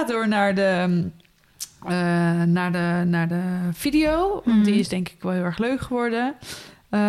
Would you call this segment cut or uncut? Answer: uncut